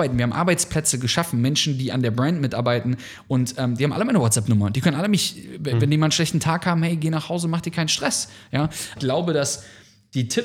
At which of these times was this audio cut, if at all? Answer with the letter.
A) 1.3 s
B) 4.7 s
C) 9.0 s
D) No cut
C